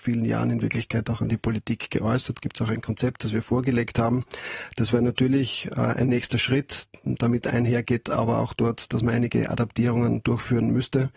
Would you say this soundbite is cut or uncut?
uncut